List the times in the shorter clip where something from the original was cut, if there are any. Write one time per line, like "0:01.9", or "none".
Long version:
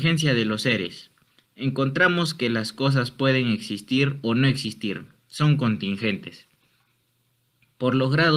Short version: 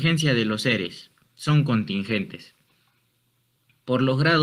0:01.3